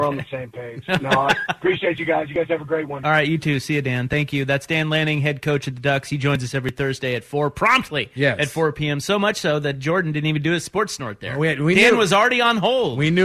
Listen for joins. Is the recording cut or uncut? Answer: uncut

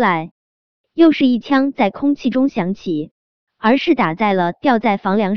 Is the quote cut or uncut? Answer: cut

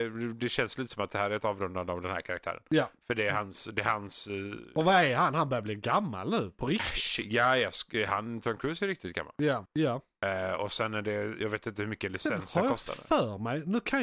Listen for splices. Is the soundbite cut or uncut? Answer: cut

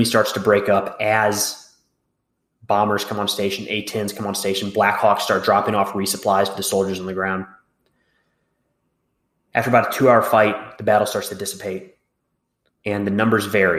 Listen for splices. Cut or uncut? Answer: cut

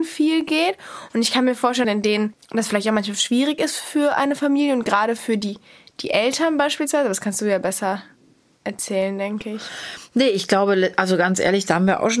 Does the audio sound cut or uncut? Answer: cut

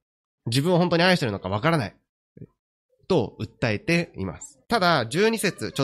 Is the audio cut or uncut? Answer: cut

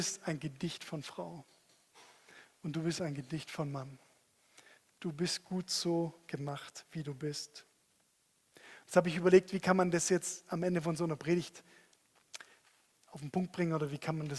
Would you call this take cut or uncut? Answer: uncut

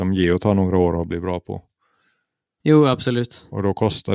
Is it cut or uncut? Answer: uncut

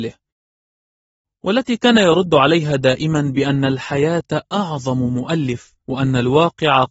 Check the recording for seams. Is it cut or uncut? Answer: cut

